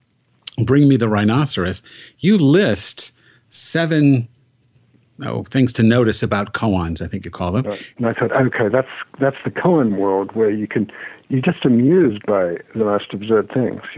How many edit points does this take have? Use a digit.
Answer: 1